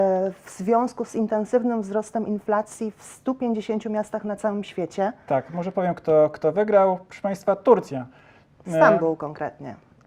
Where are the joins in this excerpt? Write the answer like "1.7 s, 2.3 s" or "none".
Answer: none